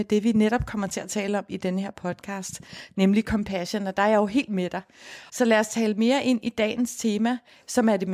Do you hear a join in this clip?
yes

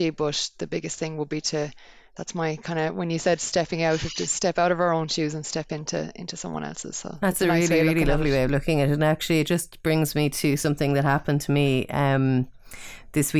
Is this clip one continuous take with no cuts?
yes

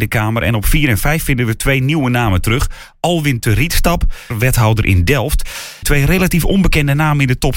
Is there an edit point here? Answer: yes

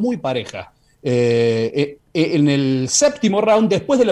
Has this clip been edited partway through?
no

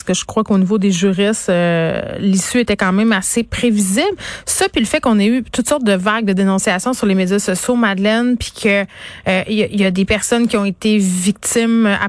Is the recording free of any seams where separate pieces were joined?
yes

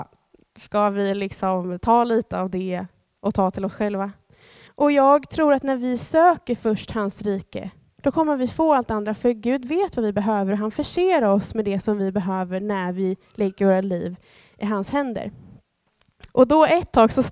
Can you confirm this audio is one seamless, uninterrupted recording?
no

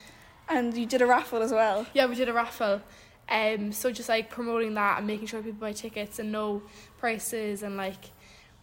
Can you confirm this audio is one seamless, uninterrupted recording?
yes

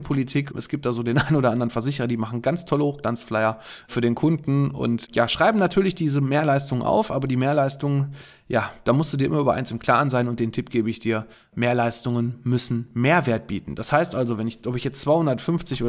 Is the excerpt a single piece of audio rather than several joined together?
yes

